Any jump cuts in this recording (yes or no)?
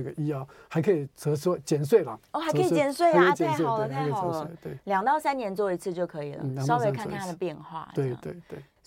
no